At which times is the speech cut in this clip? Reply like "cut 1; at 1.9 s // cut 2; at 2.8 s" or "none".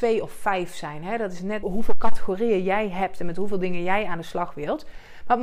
cut 1; at 1.6 s